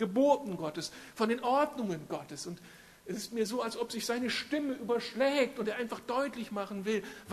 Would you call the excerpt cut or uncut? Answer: uncut